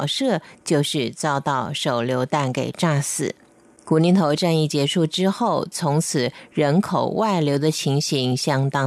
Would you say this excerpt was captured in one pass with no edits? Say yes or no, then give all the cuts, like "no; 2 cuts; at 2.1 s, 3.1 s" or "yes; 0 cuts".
no; 1 cut; at 5.7 s